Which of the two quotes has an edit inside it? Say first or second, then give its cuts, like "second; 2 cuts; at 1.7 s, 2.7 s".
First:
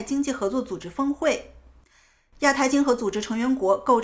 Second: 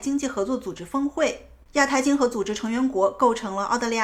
second; 1 cut; at 1.6 s